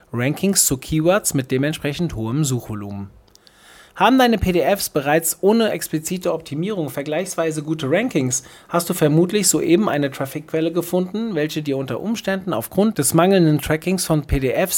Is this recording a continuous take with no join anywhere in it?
yes; 0 cuts

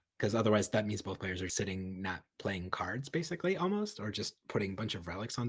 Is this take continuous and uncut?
no; 1 cut; at 1.5 s

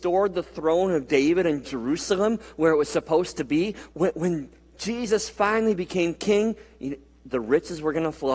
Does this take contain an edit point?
yes; 1 cut; at 3.9 s

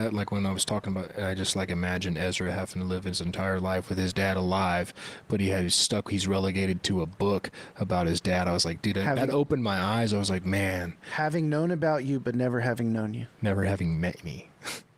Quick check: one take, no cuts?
yes; 0 cuts

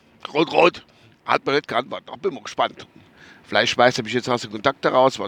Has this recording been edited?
no; 0 cuts

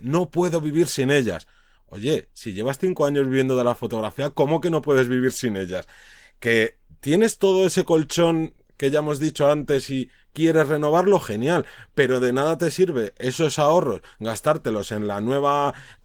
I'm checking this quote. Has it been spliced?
no; 0 cuts

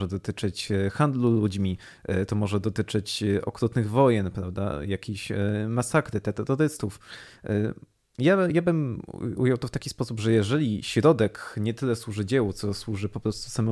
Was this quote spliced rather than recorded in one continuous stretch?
yes; 1 cut; at 8.1 s

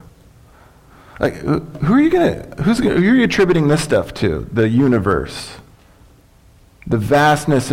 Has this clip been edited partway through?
no; 0 cuts

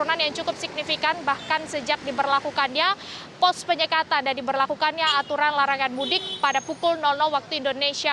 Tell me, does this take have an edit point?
no; 0 cuts

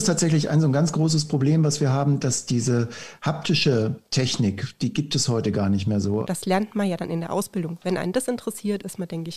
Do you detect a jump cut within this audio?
yes; 2 cuts; at 6.2 s, 7.8 s

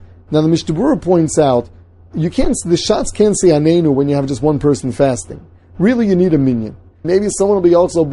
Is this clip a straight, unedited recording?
no; 1 cut; at 7.0 s

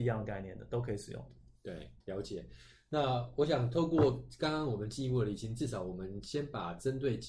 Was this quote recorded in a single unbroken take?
no; 1 cut; at 2.0 s

